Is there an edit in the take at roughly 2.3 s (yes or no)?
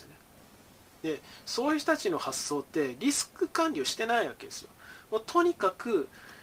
no